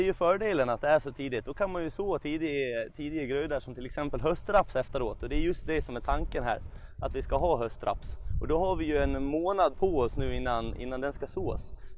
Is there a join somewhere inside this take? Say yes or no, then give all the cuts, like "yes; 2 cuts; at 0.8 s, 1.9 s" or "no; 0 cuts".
no; 0 cuts